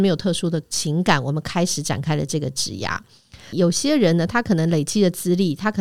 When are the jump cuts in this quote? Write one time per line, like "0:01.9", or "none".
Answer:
0:03.5